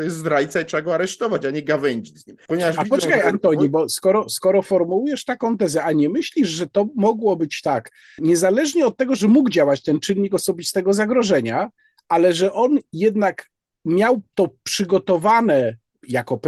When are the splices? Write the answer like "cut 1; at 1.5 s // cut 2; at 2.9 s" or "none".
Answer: cut 1; at 2.5 s // cut 2; at 8.2 s